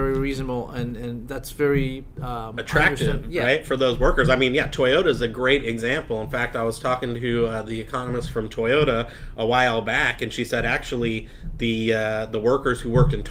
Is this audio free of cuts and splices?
yes; 0 cuts

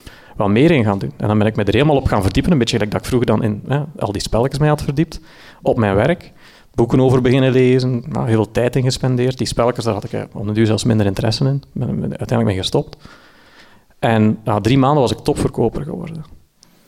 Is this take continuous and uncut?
yes; 0 cuts

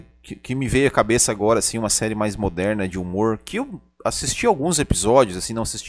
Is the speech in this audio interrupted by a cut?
no; 0 cuts

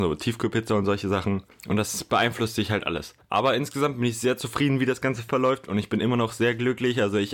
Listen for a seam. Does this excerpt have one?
no; 0 cuts

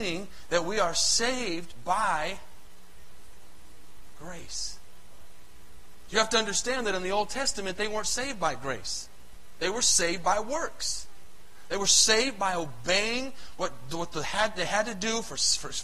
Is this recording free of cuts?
yes; 0 cuts

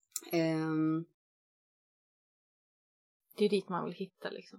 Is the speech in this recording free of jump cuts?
yes; 0 cuts

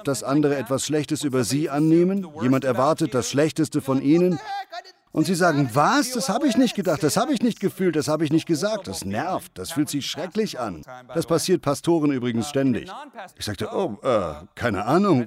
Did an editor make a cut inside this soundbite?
yes; 1 cut; at 13.3 s

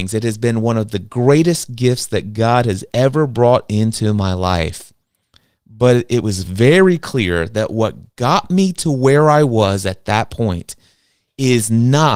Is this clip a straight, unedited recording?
yes; 0 cuts

